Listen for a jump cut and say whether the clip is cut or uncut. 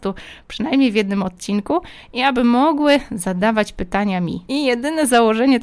cut